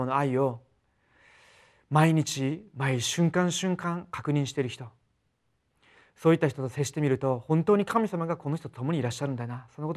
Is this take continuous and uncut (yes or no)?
yes